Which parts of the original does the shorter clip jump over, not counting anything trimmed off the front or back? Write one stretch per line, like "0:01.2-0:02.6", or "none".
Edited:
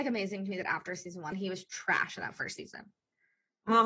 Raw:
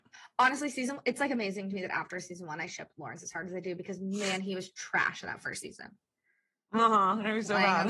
0:02.6-0:04.4